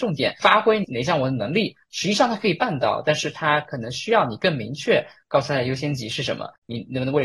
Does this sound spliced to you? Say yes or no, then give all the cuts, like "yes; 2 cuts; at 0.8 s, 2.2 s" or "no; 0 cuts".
no; 0 cuts